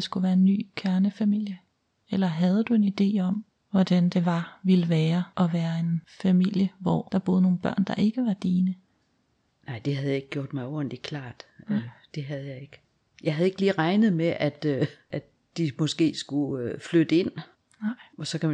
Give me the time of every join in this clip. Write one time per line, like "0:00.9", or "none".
none

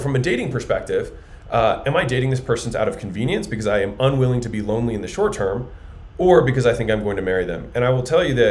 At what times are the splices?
none

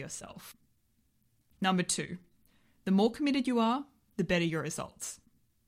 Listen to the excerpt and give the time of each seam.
none

